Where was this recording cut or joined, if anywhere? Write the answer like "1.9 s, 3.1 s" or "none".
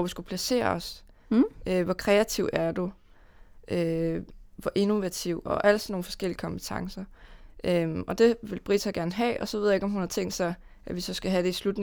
none